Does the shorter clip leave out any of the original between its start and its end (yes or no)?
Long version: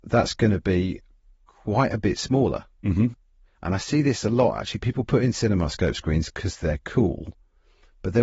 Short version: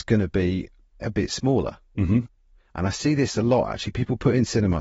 yes